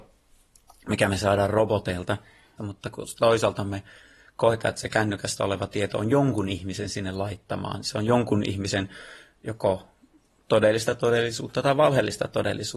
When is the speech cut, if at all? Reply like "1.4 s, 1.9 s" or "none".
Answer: 2.6 s